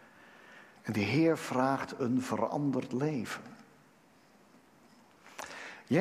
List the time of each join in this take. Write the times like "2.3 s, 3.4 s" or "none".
2.0 s